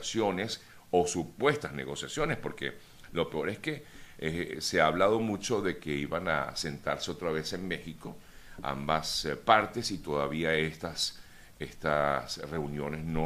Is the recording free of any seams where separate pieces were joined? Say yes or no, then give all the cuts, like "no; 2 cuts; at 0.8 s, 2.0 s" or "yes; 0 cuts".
yes; 0 cuts